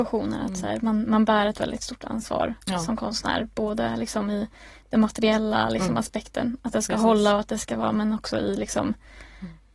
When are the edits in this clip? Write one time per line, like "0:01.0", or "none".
none